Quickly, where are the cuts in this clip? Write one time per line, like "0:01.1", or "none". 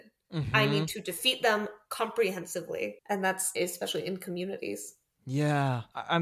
0:03.5